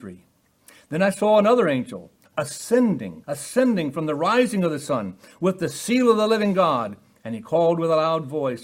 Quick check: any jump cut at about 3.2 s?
yes; 1 cut; at 3.2 s

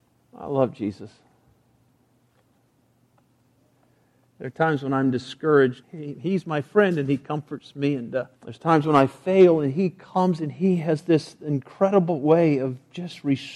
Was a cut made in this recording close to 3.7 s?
no; 2 cuts; at 5.8 s, 8.3 s

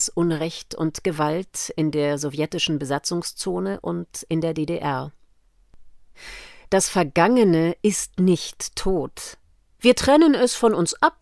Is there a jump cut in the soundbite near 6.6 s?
no; 1 cut; at 9.8 s

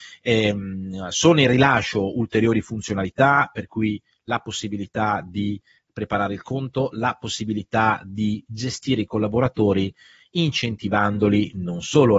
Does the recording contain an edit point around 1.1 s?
no; 0 cuts

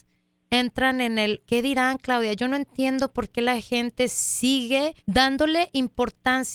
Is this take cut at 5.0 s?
yes; 2 cuts; at 1.4 s, 5.0 s

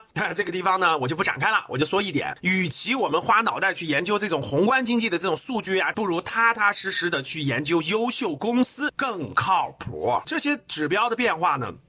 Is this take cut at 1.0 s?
no; 2 cuts; at 5.9 s, 10.2 s

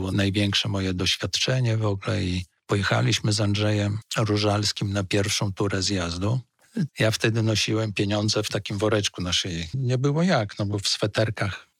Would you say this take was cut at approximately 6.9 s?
yes; 1 cut; at 6.9 s

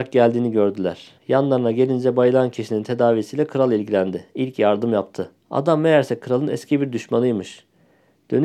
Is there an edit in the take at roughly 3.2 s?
no; 2 cuts; at 1.2 s, 5.4 s

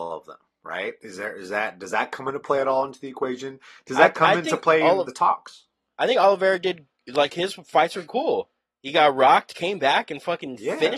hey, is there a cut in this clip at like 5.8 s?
no; 0 cuts

